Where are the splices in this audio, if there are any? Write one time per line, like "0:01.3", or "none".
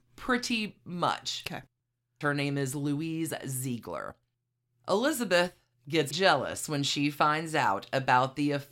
0:02.2
0:06.1